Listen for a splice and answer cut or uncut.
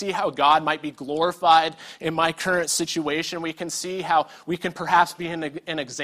uncut